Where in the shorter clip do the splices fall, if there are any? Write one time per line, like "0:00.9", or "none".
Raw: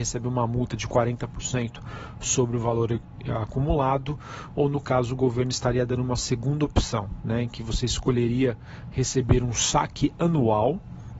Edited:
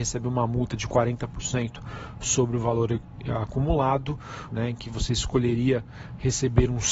0:04.5